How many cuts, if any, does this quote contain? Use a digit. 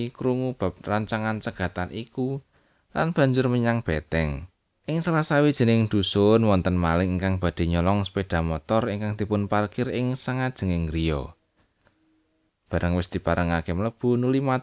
2